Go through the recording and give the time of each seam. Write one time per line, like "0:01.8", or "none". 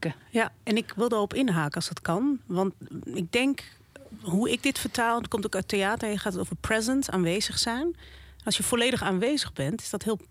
none